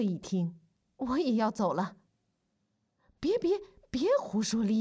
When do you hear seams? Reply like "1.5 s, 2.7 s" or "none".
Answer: none

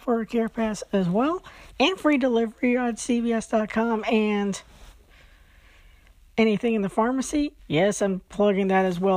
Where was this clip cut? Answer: 7.6 s

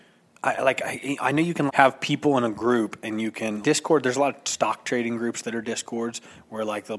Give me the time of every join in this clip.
1.7 s, 3.6 s

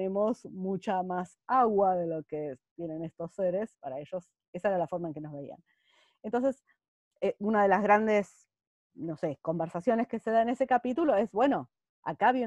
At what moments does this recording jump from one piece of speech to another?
3.7 s

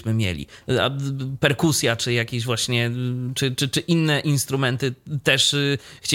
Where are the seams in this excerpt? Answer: 3.5 s

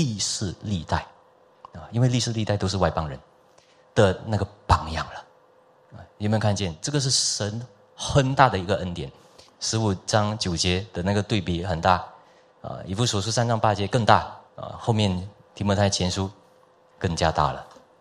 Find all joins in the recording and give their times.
9.5 s, 14.5 s

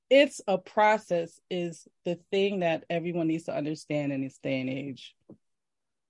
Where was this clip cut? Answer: none

